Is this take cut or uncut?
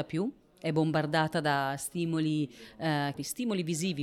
cut